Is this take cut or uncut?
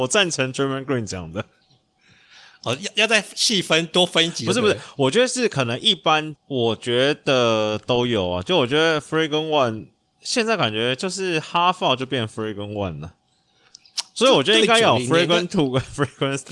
cut